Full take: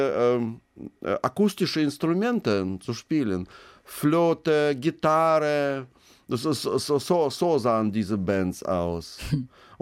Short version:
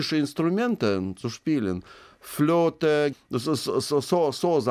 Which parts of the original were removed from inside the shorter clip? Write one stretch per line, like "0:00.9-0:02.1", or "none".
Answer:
0:04.8-0:06.1